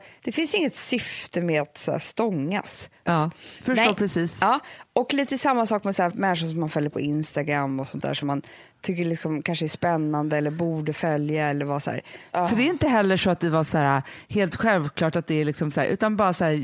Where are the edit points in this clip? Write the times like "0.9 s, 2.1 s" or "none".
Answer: 3.1 s, 12.3 s